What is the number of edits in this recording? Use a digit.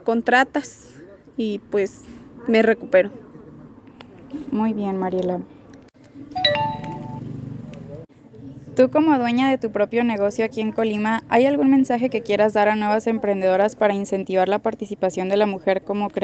0